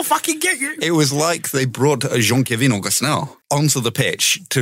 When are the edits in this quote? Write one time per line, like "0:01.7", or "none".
0:03.4